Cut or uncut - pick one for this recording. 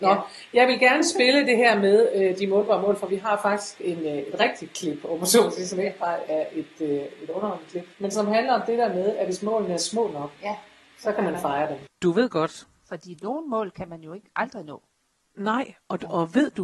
cut